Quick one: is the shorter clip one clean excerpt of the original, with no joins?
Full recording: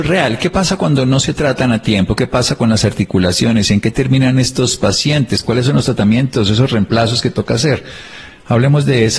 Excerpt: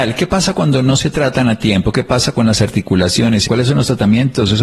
no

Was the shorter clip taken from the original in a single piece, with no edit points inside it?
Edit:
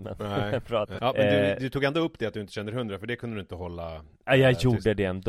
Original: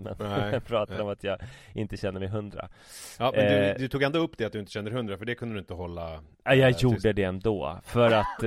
no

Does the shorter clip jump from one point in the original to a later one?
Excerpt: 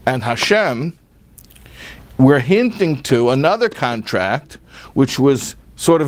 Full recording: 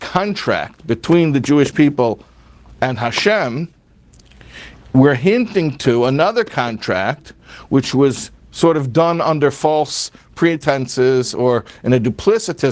no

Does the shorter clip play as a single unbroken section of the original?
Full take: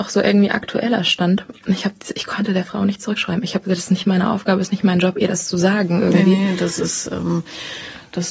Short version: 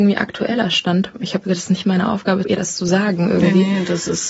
no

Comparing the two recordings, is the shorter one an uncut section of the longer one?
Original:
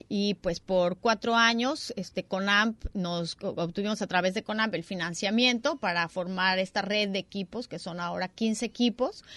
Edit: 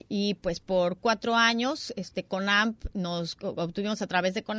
yes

